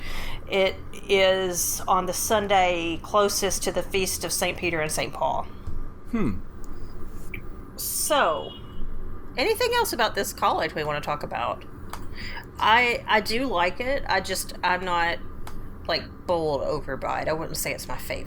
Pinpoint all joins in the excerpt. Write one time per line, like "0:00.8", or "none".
none